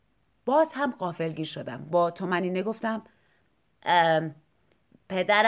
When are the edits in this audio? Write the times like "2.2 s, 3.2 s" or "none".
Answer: none